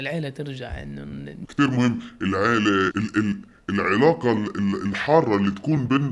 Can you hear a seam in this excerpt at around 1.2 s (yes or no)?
no